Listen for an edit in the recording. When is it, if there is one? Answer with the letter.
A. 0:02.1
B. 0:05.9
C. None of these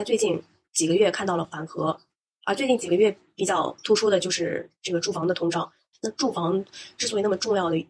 B